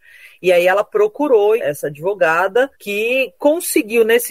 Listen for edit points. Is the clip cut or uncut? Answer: cut